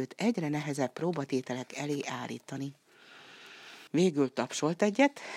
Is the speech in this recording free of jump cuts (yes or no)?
no